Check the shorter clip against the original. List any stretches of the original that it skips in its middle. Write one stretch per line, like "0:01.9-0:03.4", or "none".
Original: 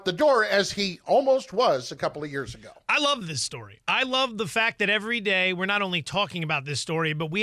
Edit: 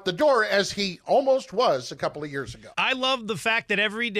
0:02.7-0:03.8